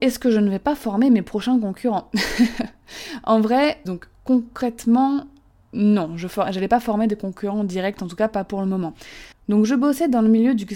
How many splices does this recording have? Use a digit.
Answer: 2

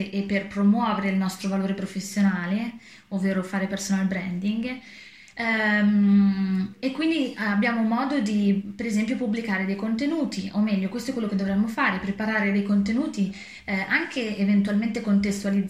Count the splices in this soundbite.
0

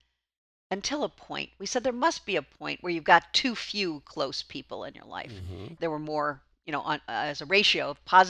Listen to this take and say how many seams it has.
2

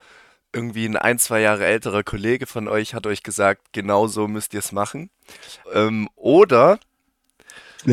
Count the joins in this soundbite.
1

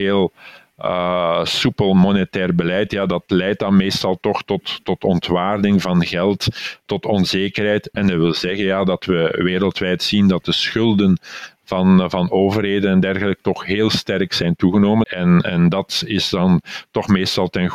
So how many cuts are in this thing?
2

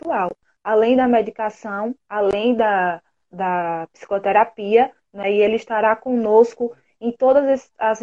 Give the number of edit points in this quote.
1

